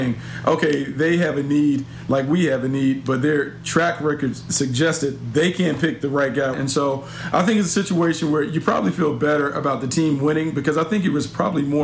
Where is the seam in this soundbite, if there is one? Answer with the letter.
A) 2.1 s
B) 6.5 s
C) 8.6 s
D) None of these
B